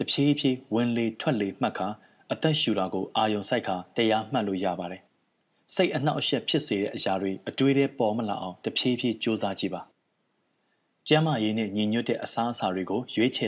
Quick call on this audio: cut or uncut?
cut